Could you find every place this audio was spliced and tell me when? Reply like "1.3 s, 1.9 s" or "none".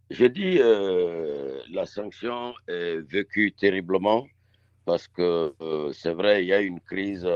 none